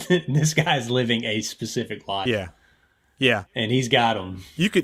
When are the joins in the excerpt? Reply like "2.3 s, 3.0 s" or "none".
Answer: none